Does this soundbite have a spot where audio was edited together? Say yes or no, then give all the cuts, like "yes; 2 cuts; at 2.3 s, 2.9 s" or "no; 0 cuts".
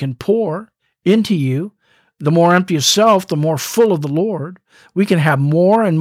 no; 0 cuts